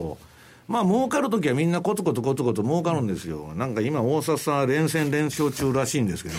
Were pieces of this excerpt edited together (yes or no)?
no